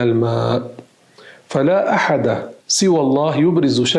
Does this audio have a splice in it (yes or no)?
yes